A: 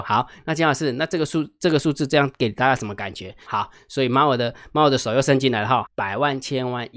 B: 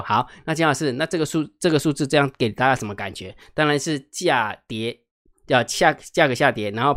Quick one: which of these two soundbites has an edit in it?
A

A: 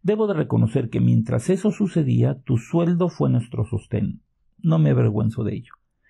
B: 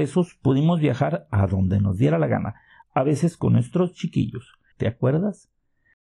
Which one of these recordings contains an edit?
B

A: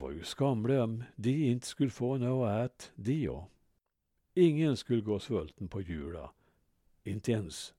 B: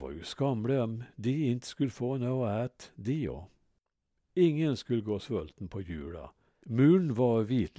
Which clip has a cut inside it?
B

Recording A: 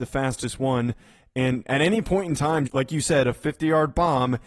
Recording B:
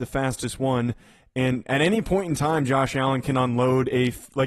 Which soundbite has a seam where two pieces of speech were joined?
A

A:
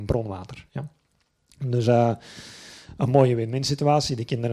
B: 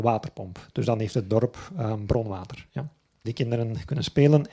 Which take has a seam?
B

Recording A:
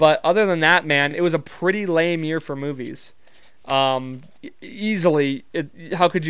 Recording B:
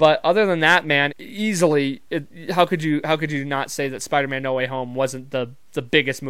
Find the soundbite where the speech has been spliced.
B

